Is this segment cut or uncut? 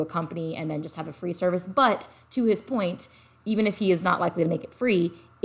uncut